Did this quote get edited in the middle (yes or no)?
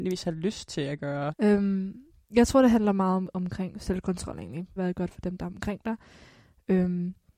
yes